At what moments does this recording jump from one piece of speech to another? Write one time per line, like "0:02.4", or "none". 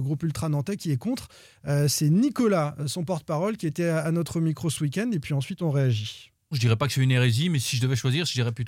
0:06.5